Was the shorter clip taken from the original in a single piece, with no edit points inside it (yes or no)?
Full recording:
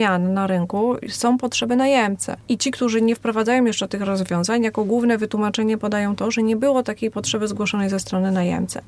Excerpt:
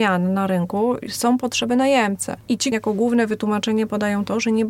no